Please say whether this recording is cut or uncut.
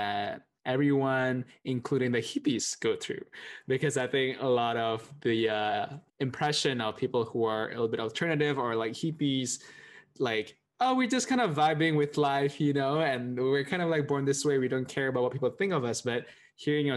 cut